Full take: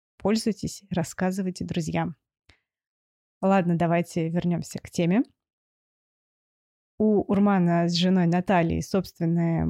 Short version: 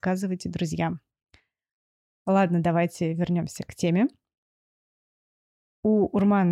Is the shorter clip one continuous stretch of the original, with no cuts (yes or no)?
yes